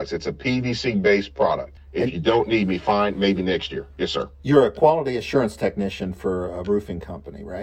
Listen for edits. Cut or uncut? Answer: cut